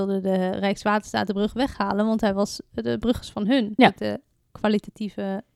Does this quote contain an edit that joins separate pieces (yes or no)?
yes